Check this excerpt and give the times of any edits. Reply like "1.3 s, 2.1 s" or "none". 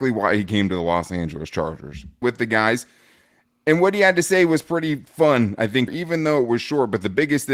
2.2 s, 5.9 s